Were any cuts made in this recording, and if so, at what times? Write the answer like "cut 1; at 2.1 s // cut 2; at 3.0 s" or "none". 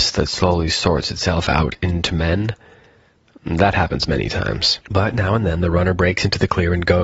cut 1; at 4.8 s